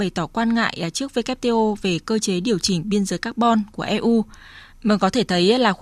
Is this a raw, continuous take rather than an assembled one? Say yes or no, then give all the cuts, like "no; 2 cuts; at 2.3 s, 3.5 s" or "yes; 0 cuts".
no; 1 cut; at 4.7 s